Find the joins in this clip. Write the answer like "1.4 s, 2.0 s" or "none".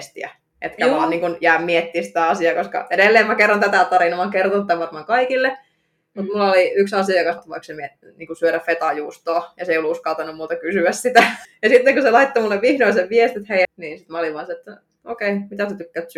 7.4 s, 11.4 s, 13.6 s